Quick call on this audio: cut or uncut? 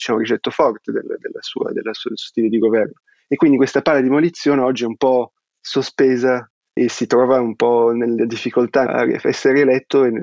cut